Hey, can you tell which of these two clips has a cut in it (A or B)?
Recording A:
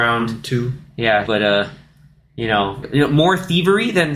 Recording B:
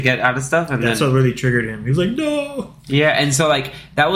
A